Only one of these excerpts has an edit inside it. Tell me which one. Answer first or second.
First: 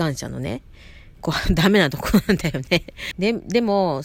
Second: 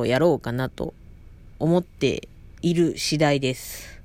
first